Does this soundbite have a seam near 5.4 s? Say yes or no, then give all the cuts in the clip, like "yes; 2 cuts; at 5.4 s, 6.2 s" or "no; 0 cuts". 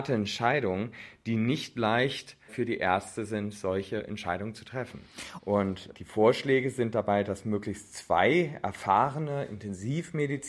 yes; 1 cut; at 5.4 s